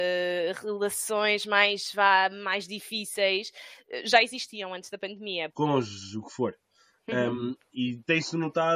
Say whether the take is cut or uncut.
cut